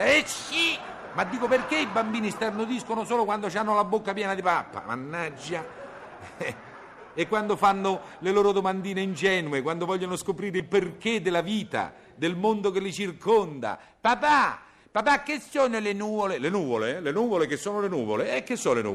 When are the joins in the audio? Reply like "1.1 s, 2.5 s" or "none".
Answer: none